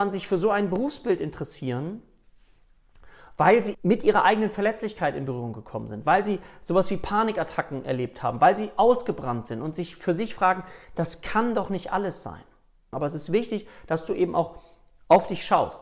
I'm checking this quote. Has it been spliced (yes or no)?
yes